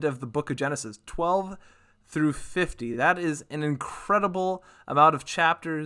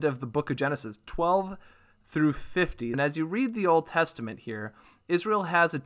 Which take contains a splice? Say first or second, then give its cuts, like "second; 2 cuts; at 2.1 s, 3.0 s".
second; 1 cut; at 2.9 s